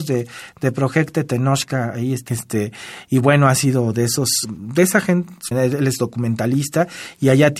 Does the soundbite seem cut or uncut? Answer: cut